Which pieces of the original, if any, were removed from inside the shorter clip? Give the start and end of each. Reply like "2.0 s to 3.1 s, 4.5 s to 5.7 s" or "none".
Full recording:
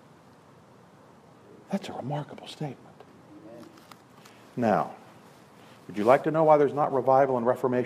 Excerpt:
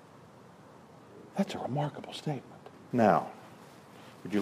3.2 s to 4.5 s